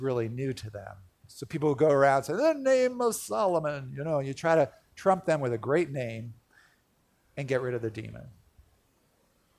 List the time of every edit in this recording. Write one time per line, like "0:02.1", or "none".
0:01.2